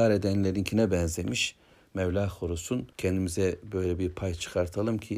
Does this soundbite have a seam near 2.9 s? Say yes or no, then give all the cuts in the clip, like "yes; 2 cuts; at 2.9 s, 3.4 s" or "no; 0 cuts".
yes; 1 cut; at 2.9 s